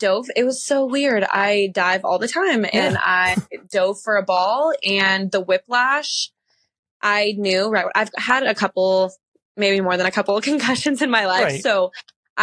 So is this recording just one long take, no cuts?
yes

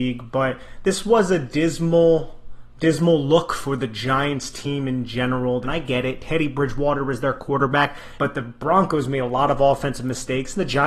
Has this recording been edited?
yes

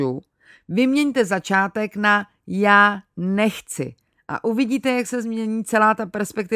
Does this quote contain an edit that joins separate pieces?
no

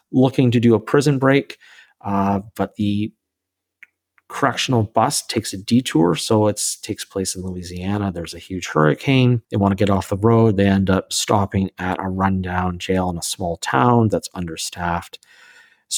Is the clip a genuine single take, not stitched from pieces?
no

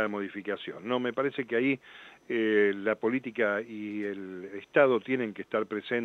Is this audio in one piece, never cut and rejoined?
yes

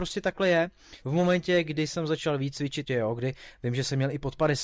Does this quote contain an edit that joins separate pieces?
yes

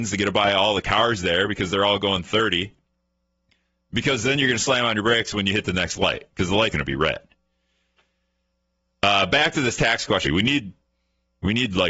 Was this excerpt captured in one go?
no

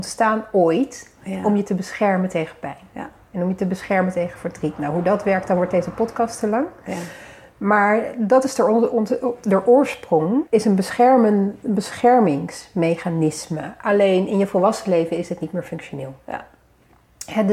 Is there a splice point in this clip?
yes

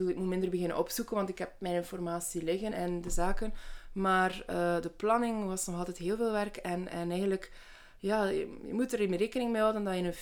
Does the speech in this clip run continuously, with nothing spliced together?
no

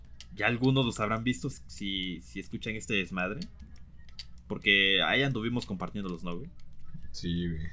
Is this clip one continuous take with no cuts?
no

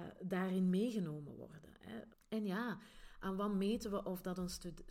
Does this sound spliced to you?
yes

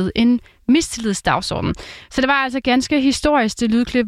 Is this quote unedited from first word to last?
yes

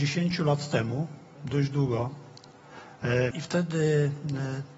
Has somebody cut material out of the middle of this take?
yes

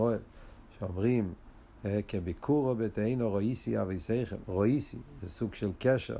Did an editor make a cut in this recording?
yes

